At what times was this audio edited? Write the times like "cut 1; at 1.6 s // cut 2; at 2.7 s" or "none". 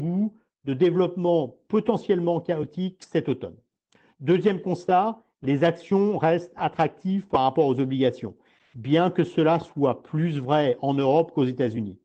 none